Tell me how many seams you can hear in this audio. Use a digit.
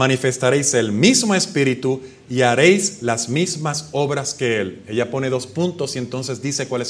0